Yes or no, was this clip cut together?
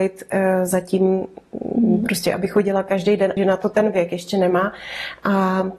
yes